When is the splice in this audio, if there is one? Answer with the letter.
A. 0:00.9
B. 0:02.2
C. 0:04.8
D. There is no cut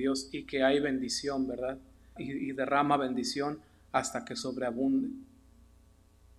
B